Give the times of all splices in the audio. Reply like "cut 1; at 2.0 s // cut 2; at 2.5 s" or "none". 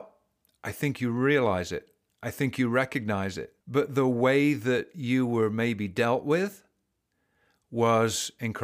cut 1; at 3.6 s